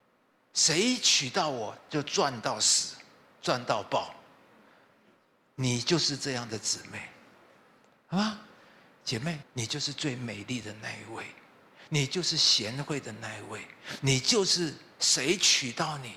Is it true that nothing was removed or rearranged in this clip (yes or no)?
no